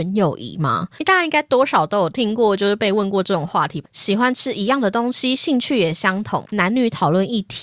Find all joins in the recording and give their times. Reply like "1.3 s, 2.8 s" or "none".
3.8 s, 6.4 s